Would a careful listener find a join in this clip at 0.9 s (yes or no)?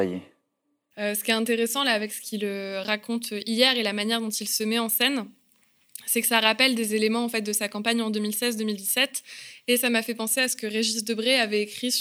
yes